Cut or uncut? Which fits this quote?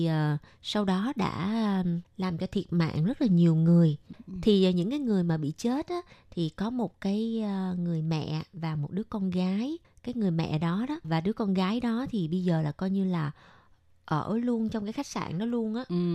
uncut